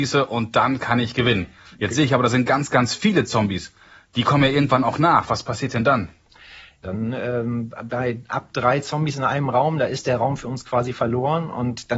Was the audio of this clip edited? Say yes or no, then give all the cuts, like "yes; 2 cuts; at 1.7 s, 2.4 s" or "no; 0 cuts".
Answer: yes; 1 cut; at 6.8 s